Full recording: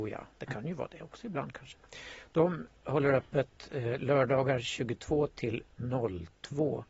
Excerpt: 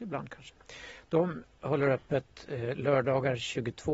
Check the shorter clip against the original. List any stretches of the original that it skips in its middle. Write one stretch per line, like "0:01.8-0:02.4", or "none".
none